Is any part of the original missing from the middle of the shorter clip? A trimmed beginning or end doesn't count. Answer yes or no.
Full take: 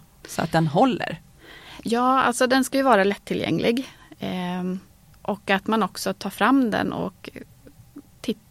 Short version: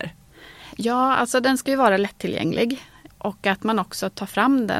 yes